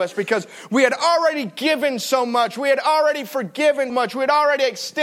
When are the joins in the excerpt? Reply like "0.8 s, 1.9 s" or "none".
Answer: 3.9 s